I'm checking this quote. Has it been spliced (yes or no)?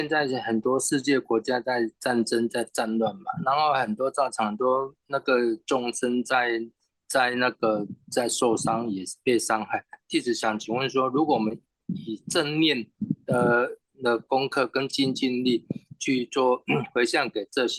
no